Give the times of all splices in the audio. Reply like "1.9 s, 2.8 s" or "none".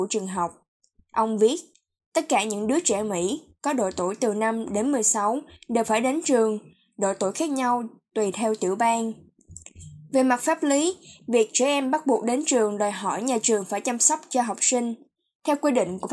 none